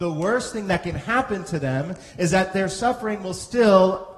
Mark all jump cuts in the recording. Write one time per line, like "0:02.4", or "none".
none